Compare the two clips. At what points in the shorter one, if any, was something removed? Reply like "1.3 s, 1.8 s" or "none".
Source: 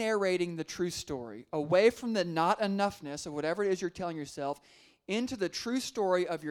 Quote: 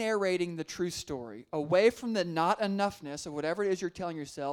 none